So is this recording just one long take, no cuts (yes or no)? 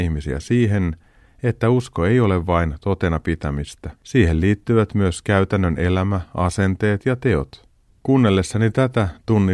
no